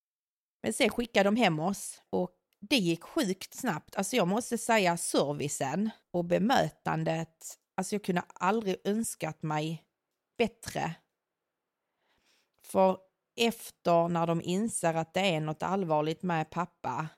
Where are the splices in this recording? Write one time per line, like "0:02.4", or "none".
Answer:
0:02.5